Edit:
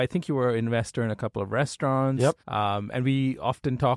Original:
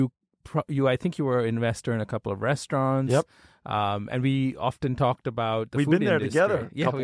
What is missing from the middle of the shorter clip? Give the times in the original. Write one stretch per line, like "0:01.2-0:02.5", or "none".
0:03.3-0:03.6